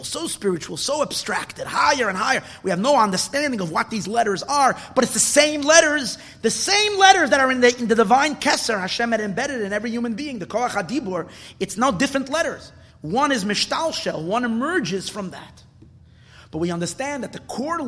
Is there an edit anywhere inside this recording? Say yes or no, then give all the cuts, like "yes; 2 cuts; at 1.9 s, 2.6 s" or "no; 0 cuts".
no; 0 cuts